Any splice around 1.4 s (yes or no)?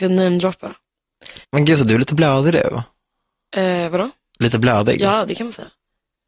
yes